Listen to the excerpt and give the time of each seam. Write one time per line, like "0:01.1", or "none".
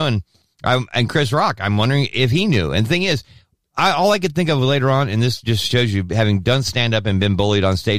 none